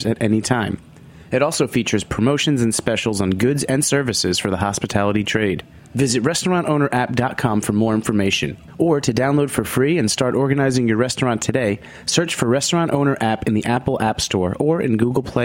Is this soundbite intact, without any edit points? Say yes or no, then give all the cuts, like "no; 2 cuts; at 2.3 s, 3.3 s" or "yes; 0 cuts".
no; 1 cut; at 5.8 s